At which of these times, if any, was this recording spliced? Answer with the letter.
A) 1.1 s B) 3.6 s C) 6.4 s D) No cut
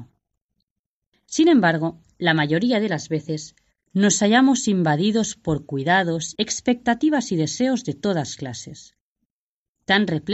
C